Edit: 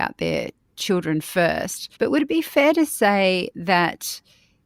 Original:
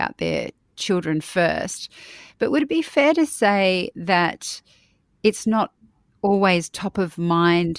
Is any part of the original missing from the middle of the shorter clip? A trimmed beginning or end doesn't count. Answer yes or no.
yes